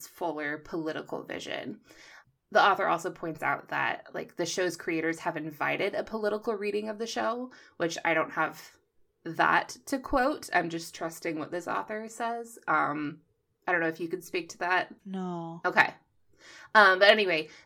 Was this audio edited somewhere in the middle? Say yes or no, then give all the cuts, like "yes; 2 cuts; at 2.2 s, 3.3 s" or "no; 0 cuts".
yes; 1 cut; at 15.0 s